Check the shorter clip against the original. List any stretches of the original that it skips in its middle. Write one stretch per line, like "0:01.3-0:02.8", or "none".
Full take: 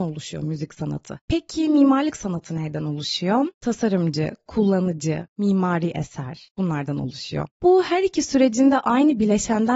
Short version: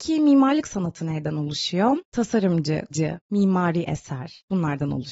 0:04.4-0:05.0